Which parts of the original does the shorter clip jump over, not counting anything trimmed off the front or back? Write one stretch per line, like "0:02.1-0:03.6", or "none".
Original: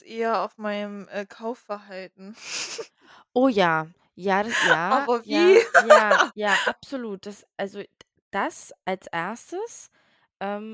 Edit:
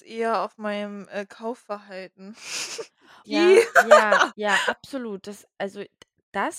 0:03.2-0:05.2